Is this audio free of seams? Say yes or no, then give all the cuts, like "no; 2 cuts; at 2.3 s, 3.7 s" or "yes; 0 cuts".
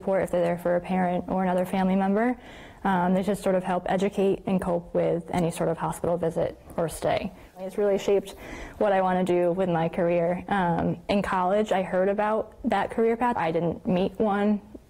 no; 2 cuts; at 7.5 s, 13.4 s